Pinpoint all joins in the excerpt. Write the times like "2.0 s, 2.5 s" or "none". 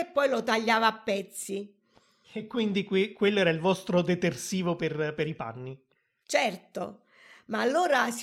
none